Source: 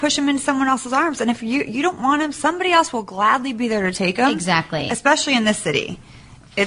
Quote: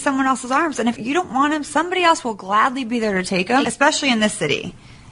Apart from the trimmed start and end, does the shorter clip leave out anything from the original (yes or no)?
yes